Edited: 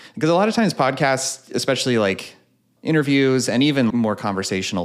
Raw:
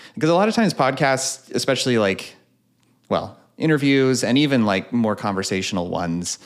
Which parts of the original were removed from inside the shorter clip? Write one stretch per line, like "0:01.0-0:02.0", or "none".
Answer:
0:02.8-0:03.5
0:04.7-0:04.9